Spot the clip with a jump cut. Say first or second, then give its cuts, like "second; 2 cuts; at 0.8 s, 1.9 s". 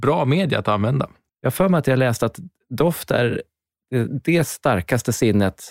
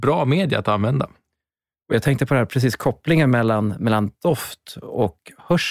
first; 1 cut; at 1.3 s